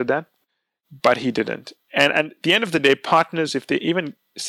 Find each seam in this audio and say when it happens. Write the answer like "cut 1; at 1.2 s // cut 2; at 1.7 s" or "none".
none